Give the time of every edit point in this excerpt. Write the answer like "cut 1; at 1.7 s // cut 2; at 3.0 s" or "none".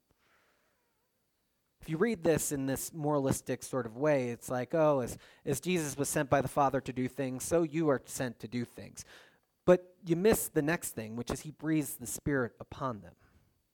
none